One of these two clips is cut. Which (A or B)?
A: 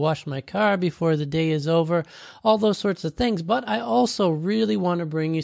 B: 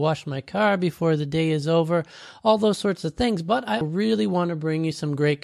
B